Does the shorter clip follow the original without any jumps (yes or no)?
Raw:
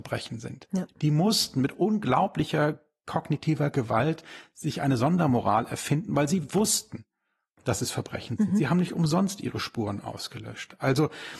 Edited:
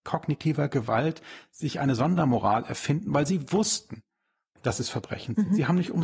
yes